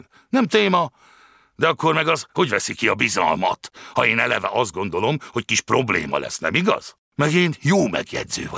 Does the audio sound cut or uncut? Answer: uncut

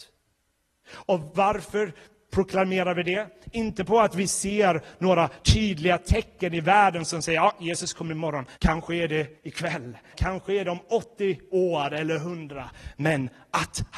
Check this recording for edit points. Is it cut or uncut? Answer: cut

